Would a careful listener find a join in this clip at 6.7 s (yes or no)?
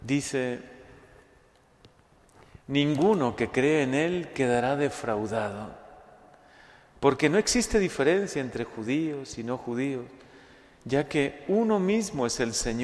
no